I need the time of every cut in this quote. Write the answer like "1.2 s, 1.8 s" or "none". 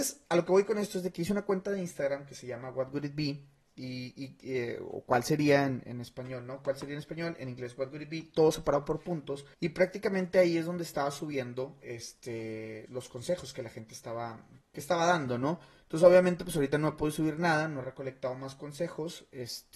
9.5 s, 12.9 s, 14.6 s

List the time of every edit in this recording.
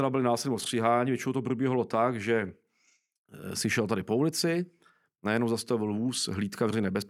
none

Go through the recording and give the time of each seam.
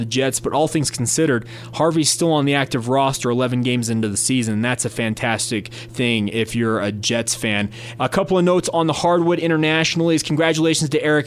8.0 s

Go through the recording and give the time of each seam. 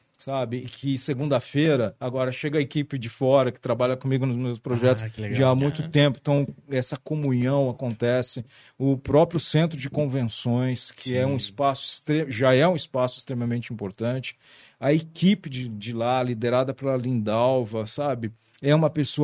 none

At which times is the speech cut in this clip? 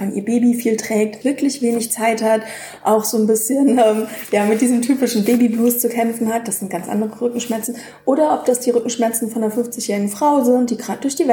1.2 s

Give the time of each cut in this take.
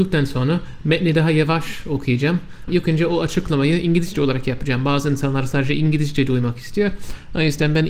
2.7 s

